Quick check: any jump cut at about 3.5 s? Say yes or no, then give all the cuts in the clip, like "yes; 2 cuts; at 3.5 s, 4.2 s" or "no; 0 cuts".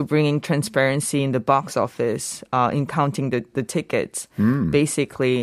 yes; 1 cut; at 3.5 s